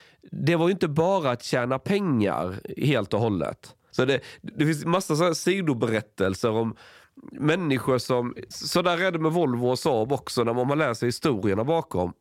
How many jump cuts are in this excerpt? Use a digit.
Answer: 2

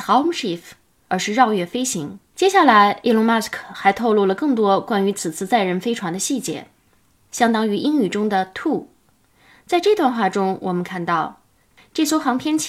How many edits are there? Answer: 3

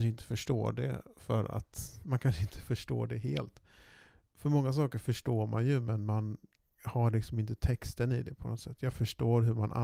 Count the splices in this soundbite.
0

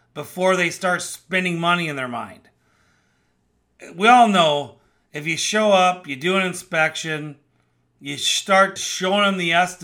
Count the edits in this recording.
1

